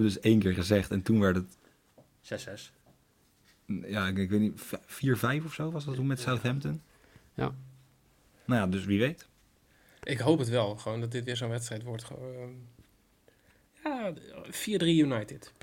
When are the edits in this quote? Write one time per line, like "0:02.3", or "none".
none